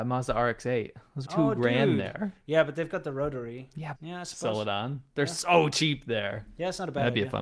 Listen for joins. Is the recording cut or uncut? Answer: cut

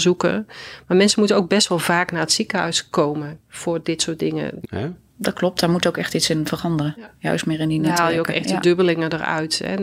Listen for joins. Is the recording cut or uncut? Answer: cut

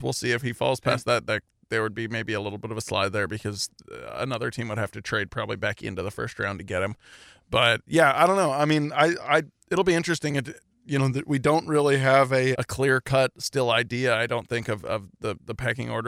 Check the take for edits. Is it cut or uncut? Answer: cut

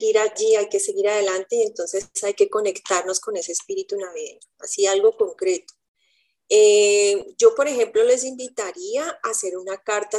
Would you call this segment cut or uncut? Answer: cut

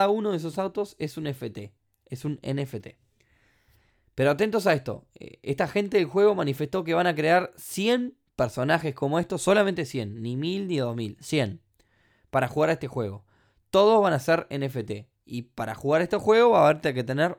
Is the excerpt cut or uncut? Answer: uncut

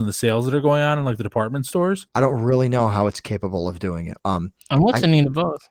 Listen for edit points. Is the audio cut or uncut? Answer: cut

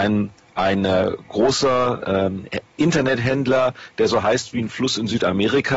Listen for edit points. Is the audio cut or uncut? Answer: uncut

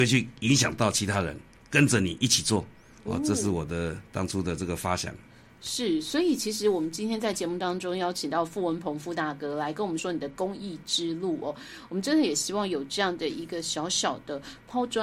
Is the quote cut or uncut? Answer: cut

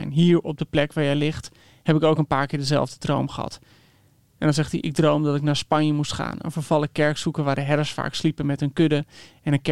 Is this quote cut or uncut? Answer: uncut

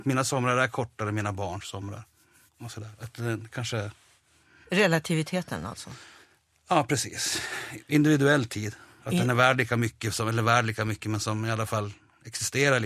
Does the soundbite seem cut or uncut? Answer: uncut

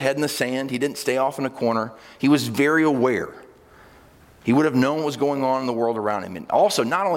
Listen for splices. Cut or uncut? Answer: uncut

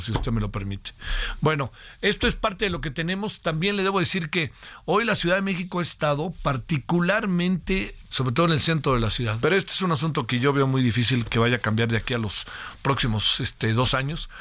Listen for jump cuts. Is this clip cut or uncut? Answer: cut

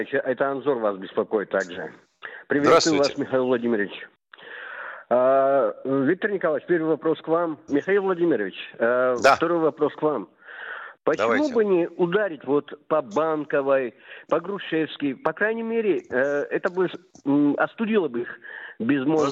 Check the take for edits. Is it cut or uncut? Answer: cut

